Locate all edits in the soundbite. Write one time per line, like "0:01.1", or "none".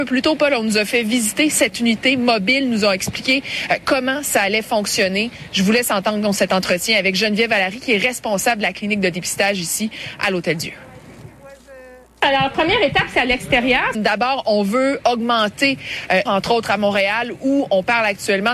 0:13.9
0:15.0
0:16.3